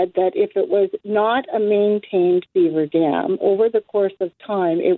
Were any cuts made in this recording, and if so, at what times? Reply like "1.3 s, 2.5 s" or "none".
none